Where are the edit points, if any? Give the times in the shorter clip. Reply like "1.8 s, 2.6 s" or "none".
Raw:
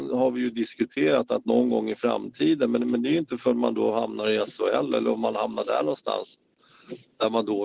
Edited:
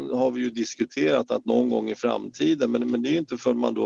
none